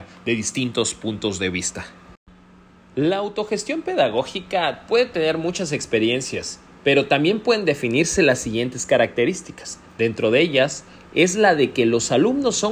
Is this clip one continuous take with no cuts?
yes; 0 cuts

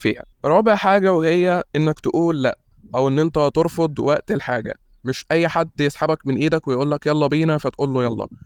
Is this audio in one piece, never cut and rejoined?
yes; 0 cuts

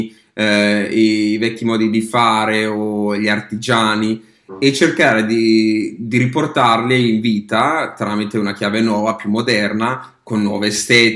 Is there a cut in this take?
no; 0 cuts

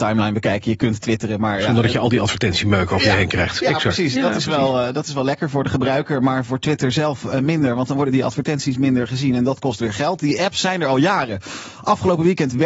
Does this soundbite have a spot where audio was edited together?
no; 0 cuts

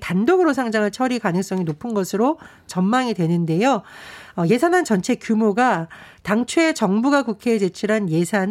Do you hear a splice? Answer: no; 0 cuts

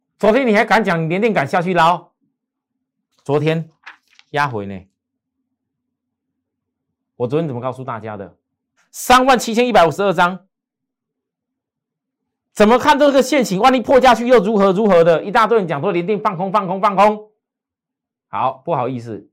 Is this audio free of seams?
no; 2 cuts; at 3.1 s, 8.8 s

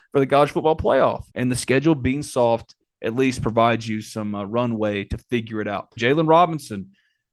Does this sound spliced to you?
yes; 2 cuts; at 1.3 s, 6.0 s

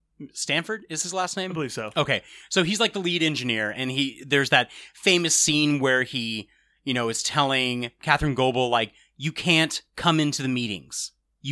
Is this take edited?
no; 0 cuts

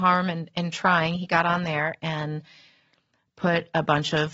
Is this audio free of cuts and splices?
yes; 0 cuts

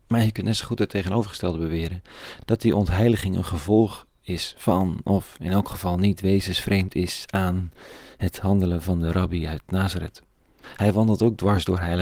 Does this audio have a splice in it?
no; 0 cuts

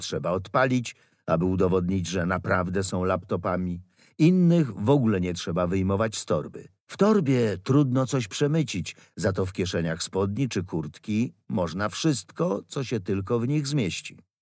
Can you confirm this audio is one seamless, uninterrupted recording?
no; 1 cut; at 6.8 s

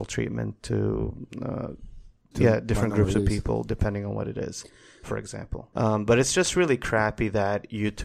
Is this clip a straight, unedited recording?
no; 2 cuts; at 2.3 s, 5.7 s

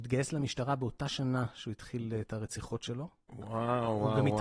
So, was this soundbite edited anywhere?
no; 0 cuts

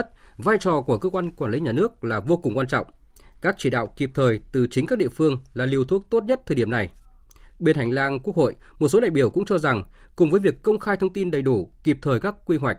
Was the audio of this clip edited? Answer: no; 0 cuts

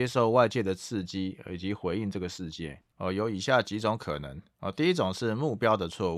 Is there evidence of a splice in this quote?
yes; 1 cut; at 2.9 s

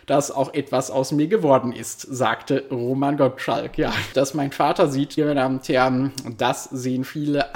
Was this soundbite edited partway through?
yes; 2 cuts; at 4.1 s, 5.2 s

